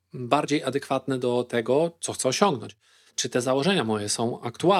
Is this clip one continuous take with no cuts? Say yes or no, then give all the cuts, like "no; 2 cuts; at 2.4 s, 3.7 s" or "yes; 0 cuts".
yes; 0 cuts